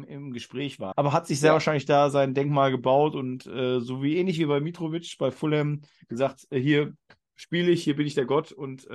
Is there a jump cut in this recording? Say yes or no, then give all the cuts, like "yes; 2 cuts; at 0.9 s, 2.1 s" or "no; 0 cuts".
yes; 1 cut; at 0.9 s